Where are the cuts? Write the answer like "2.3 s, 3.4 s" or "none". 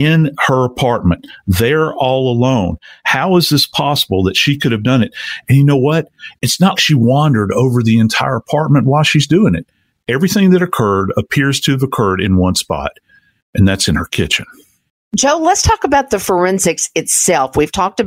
6.8 s